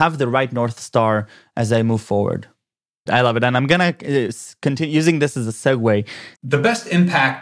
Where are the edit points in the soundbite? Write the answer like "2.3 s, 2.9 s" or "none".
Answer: 3.1 s, 6.3 s